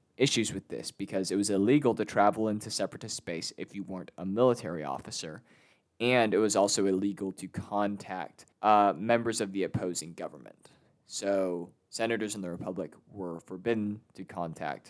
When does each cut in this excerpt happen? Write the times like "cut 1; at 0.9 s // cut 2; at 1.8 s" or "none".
cut 1; at 8.5 s